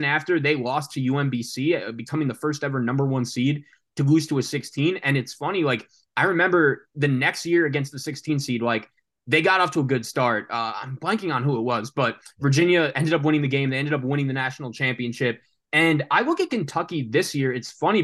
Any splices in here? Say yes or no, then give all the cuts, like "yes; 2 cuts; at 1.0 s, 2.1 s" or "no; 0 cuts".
no; 0 cuts